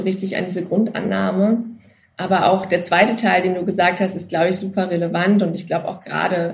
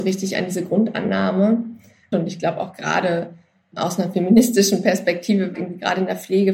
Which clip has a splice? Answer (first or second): second